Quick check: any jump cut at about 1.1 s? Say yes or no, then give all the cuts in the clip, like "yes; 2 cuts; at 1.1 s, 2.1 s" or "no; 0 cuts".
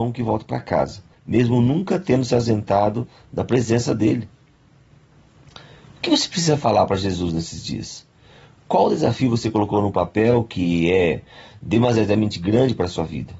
yes; 1 cut; at 1.1 s